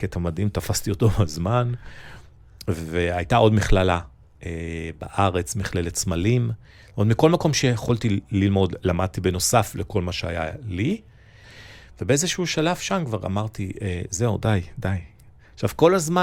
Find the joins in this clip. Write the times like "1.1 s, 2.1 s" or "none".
11.4 s